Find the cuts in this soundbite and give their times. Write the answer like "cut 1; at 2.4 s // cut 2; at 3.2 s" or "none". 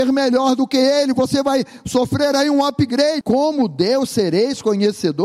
cut 1; at 3.2 s